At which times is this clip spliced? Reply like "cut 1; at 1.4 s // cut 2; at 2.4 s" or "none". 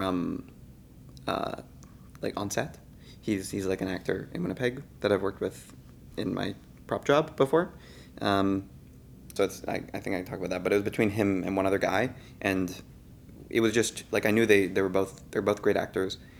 cut 1; at 9.4 s